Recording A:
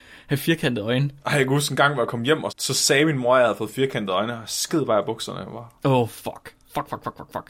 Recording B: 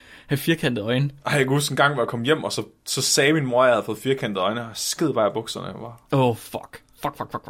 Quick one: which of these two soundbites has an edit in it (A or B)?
A